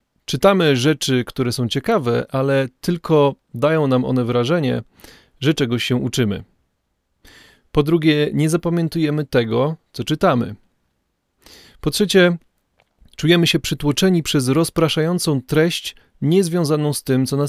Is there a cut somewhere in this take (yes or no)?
no